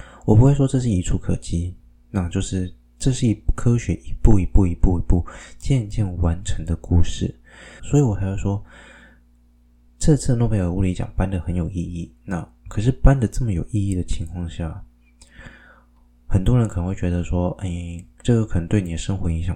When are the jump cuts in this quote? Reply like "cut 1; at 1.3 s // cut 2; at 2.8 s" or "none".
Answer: cut 1; at 7.8 s